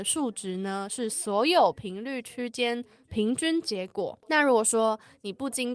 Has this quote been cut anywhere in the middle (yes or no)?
no